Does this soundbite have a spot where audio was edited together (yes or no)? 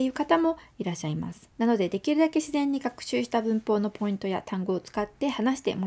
no